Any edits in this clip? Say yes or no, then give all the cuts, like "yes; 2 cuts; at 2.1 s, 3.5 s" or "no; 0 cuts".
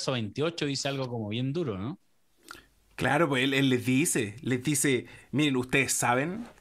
no; 0 cuts